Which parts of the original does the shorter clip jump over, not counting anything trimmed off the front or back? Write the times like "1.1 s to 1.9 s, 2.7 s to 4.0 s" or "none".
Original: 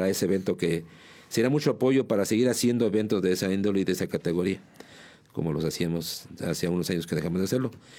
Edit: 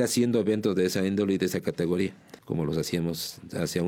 4.9 s to 5.3 s